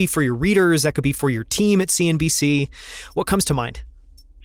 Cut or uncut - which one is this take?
uncut